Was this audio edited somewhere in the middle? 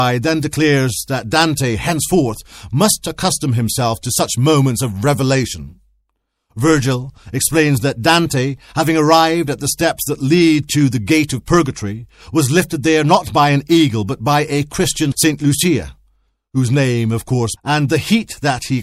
yes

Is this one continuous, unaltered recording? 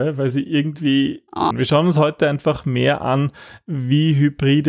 no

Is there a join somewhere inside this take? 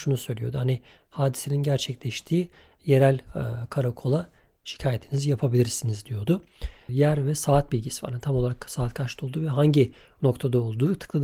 yes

